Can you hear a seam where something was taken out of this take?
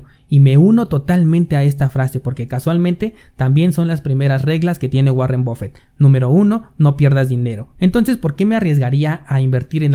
yes; 1 cut; at 7.8 s

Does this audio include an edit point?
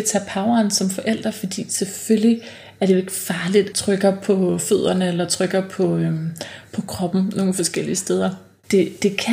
yes; 1 cut; at 3.7 s

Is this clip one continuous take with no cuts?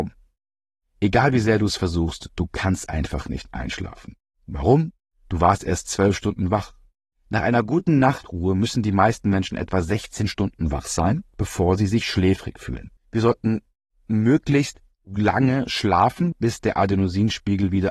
no; 3 cuts; at 7.1 s, 13.0 s, 16.3 s

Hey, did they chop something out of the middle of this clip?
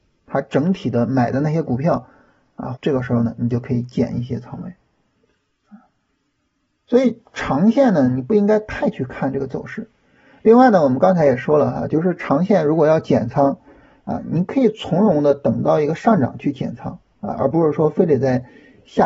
yes; 1 cut; at 2.7 s

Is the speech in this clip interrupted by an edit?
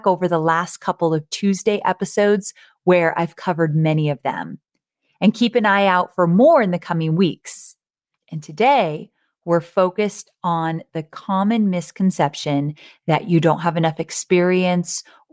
no; 0 cuts

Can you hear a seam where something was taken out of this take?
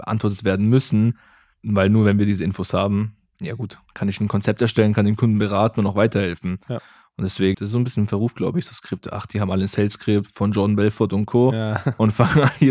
yes; 1 cut; at 7.5 s

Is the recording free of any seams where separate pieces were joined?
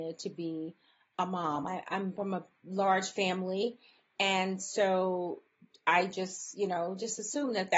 yes; 0 cuts

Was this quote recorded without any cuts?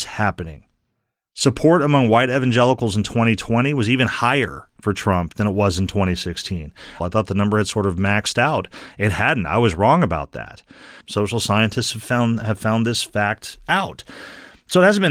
no; 2 cuts; at 7.0 s, 11.0 s

